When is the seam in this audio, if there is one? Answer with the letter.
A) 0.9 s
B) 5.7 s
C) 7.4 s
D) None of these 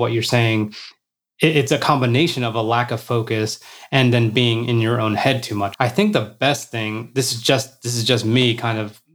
B